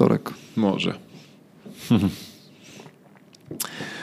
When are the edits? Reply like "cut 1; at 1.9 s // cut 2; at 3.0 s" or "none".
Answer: cut 1; at 1.6 s